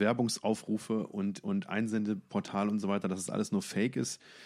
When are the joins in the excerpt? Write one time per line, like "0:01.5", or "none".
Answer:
none